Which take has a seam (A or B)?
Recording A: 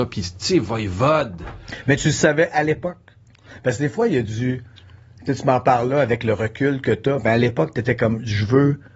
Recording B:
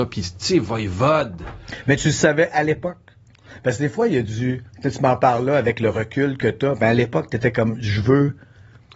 B